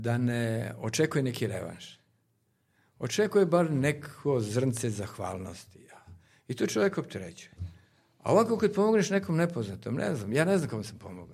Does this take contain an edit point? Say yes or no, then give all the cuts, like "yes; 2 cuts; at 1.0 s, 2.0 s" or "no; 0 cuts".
no; 0 cuts